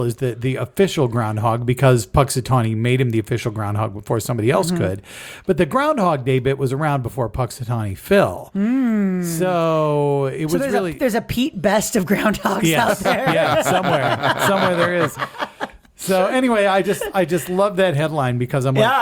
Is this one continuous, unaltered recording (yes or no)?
yes